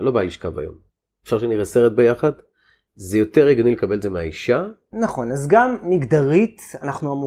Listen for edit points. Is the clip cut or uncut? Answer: uncut